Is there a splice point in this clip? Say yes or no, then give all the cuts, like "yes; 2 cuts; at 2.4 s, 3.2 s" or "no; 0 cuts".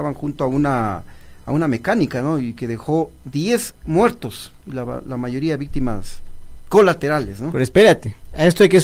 no; 0 cuts